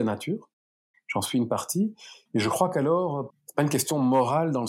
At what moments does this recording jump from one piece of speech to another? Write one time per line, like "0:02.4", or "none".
0:02.3
0:03.3